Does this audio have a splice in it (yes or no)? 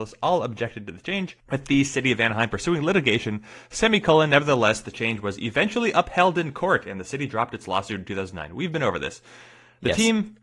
no